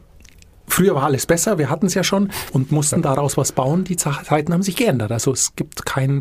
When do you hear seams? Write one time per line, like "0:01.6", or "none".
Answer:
0:02.5